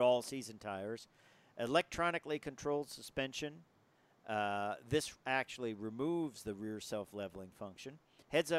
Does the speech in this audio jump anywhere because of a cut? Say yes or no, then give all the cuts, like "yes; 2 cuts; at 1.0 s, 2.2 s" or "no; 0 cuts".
no; 0 cuts